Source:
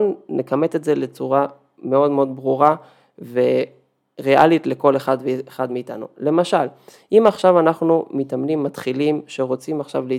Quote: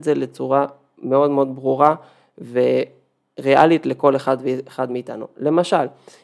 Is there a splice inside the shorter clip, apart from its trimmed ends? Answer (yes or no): no